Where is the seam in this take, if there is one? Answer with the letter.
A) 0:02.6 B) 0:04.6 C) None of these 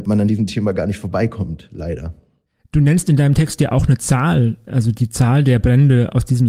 C